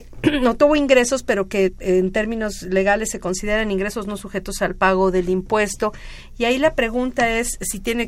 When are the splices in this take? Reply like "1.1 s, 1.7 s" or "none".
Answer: none